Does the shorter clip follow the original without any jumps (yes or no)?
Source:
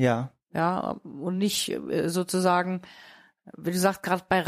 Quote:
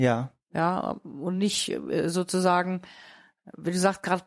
yes